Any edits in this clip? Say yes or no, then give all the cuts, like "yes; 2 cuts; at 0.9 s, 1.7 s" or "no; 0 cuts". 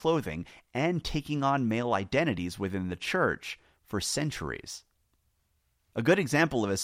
no; 0 cuts